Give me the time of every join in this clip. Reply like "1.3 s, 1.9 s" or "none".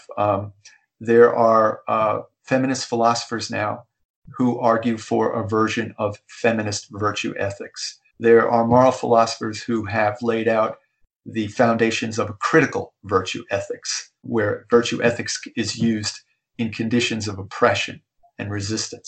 8.1 s, 14.2 s